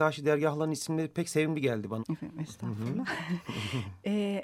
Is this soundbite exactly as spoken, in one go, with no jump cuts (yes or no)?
no